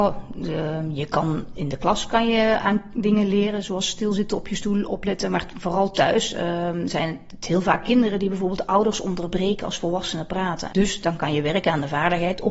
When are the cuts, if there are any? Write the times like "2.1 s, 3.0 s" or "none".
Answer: 10.7 s